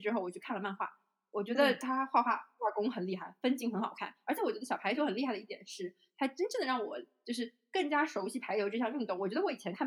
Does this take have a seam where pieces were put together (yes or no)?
no